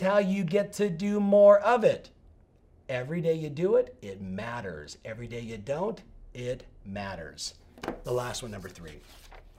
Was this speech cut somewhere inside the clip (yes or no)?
yes